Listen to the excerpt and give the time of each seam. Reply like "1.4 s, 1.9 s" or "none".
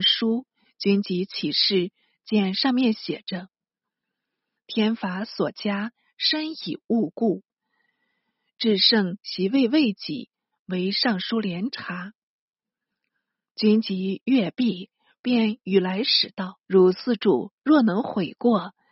4.6 s, 16.6 s

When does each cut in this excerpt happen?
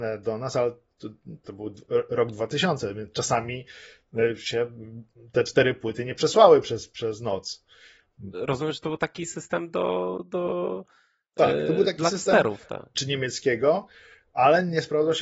1.4 s, 8.3 s, 12.9 s

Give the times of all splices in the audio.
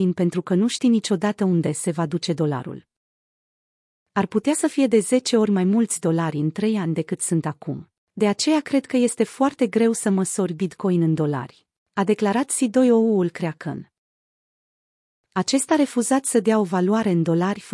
none

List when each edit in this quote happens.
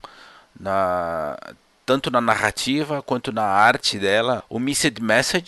4.4 s

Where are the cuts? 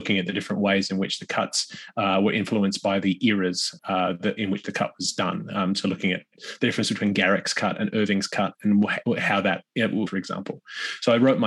3.8 s, 10.1 s

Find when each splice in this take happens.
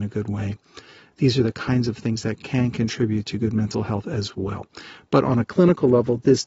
none

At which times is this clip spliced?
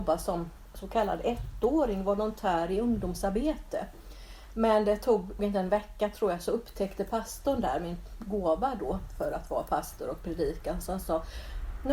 5.4 s

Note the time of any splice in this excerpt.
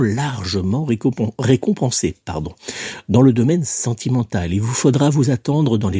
none

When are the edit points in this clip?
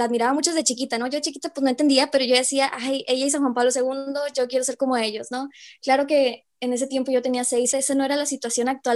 7.7 s

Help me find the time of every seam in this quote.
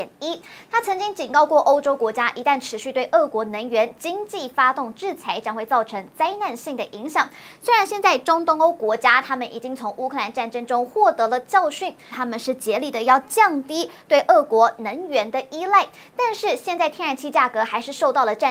12.1 s

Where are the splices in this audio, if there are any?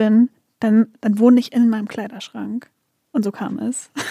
none

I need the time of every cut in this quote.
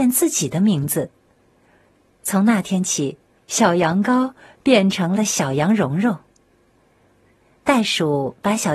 3.4 s

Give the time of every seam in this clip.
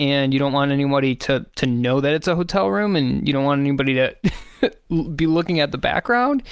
none

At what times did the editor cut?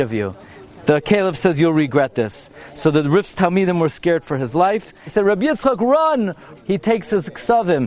5.1 s, 6.5 s

